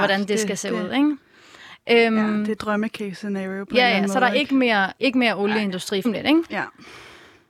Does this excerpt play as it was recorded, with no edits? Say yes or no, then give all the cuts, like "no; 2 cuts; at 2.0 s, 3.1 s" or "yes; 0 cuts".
no; 2 cuts; at 5.0 s, 6.0 s